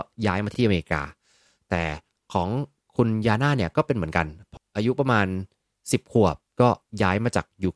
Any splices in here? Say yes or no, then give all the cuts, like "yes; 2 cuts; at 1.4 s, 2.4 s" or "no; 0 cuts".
yes; 1 cut; at 4.6 s